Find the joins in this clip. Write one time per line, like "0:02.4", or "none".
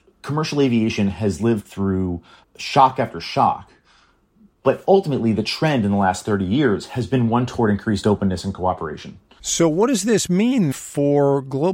0:02.4
0:09.4
0:10.7